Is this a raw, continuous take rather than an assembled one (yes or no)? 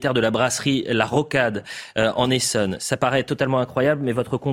yes